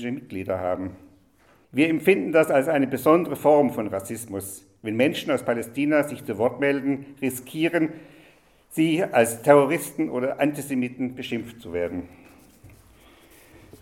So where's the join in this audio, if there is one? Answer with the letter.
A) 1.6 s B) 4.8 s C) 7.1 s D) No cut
A